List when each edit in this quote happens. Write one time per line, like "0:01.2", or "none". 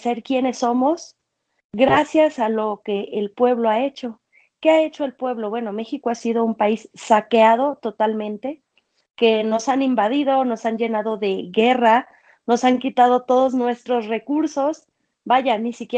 none